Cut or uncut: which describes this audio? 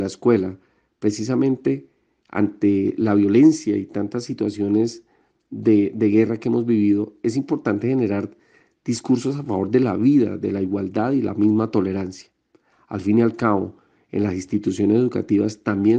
uncut